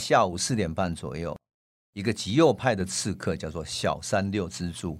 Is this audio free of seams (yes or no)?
no